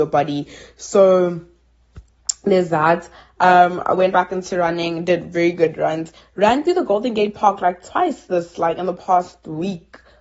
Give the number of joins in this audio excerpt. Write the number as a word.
zero